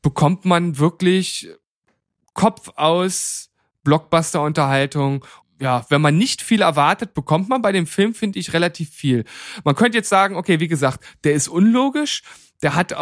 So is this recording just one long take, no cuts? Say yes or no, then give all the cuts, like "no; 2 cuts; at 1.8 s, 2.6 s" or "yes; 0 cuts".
no; 1 cut; at 5.4 s